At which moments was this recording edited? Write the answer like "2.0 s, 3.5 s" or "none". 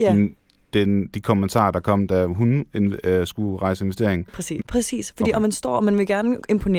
4.6 s